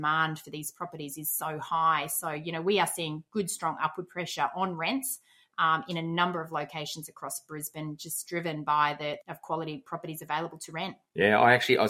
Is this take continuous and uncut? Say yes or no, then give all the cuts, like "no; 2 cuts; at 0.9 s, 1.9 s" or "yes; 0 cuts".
no; 1 cut; at 9.2 s